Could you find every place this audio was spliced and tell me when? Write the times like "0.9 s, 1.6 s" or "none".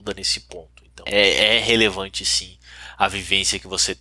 1.1 s